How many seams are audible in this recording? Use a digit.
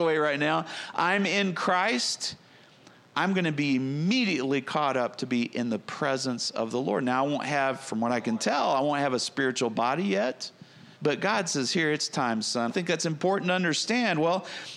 2